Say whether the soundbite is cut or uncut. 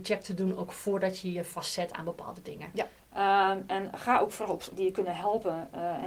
cut